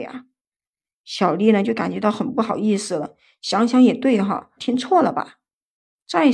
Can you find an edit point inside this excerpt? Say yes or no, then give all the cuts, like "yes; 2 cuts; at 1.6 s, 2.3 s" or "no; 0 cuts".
yes; 1 cut; at 4.6 s